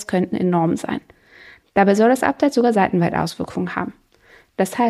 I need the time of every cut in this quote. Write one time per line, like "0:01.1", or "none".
0:01.6